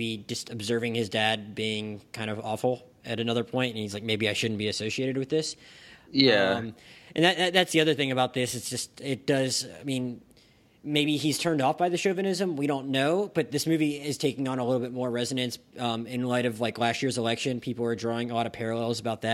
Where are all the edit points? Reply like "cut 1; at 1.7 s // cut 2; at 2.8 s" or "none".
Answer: none